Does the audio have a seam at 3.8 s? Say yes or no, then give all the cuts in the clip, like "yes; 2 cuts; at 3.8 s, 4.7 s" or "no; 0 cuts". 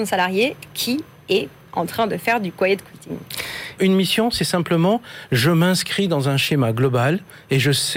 yes; 1 cut; at 3.8 s